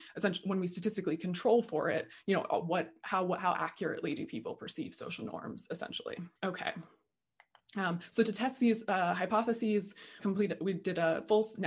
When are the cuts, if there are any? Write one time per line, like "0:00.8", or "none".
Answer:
0:06.4
0:10.2